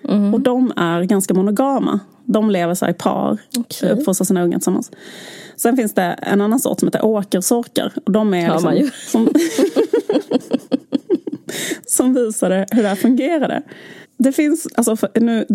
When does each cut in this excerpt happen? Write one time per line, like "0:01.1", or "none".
0:09.1
0:14.0